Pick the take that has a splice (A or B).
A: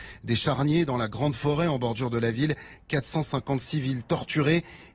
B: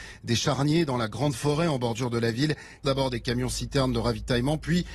B